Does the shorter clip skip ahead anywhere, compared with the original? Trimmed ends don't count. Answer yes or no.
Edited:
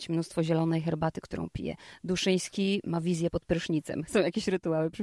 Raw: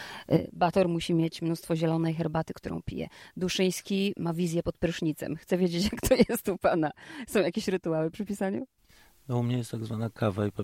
yes